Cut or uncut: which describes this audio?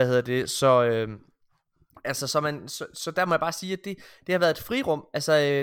uncut